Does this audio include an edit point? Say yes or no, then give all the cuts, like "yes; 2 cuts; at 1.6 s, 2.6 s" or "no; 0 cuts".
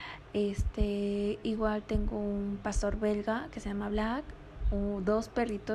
no; 0 cuts